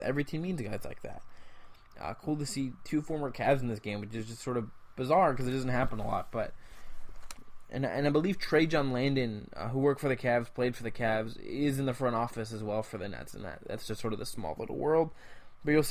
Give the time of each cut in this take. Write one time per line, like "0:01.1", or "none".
0:01.9

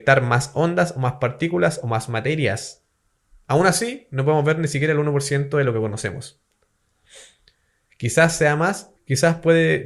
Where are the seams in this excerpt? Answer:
0:03.4
0:07.9
0:09.0

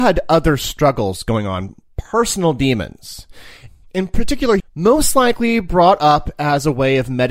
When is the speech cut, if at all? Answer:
0:04.6

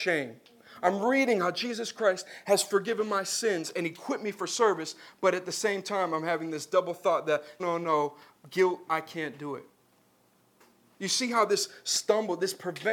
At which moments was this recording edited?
0:07.6
0:08.9

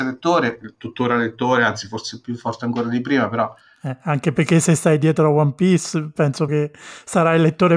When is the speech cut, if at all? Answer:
0:06.5

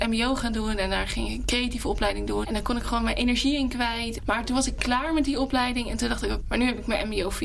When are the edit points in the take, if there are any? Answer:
0:02.4
0:04.2
0:06.4

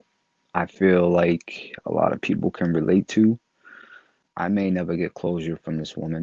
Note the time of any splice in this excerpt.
0:04.3

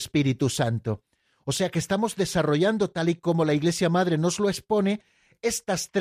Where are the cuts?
none

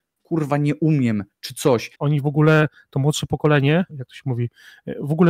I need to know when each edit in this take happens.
0:01.9
0:03.9

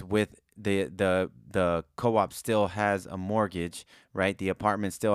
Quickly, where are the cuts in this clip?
none

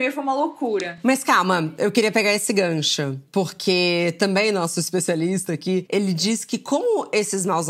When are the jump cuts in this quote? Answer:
none

